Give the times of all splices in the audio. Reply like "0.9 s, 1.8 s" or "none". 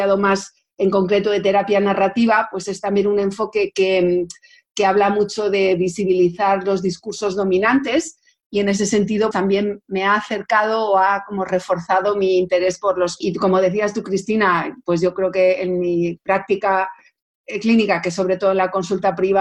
9.3 s, 13.2 s